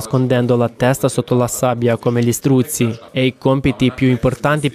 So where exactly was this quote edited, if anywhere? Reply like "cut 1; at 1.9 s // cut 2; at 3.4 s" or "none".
cut 1; at 3.1 s